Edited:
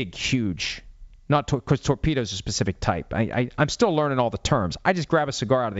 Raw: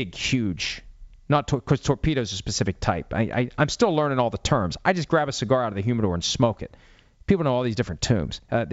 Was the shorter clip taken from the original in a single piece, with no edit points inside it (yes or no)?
yes